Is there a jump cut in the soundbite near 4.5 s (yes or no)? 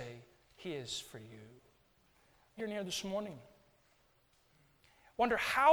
no